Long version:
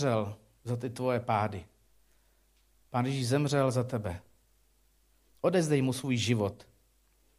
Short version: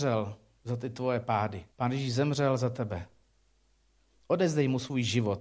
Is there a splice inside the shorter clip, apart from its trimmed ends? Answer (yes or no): yes